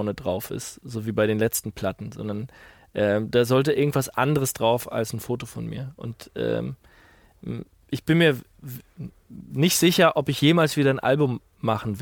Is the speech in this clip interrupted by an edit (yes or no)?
no